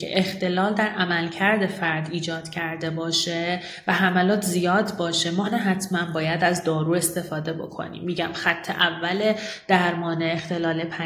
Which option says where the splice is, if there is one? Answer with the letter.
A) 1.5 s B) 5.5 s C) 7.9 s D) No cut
B